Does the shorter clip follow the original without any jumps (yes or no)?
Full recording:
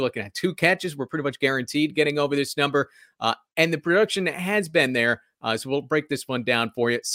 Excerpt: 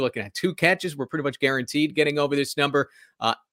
yes